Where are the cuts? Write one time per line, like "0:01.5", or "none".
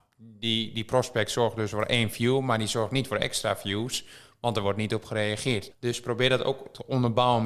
0:05.7